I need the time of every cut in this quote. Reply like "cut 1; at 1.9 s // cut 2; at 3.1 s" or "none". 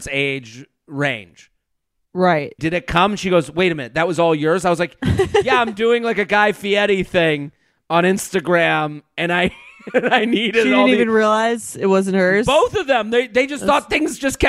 cut 1; at 2.6 s

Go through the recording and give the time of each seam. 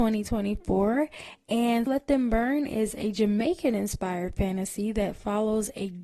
cut 1; at 1.9 s

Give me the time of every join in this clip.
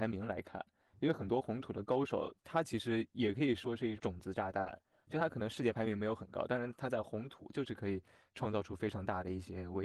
cut 1; at 4.0 s

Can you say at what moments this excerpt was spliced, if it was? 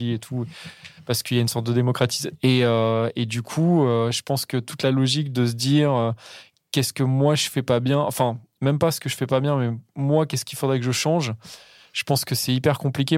cut 1; at 2.4 s

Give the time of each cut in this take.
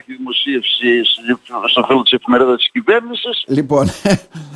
cut 1; at 3.5 s

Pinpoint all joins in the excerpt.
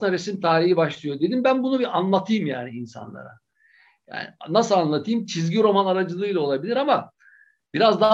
none

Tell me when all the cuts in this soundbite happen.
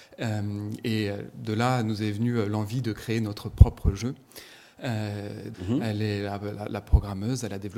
cut 1; at 5.5 s

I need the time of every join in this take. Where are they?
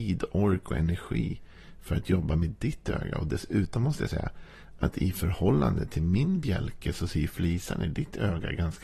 none

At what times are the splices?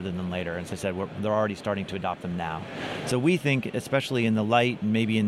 none

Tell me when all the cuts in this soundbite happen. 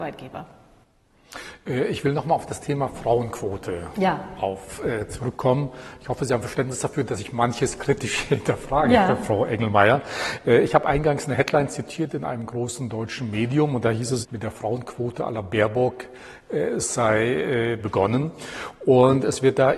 cut 1; at 14.2 s // cut 2; at 17.8 s

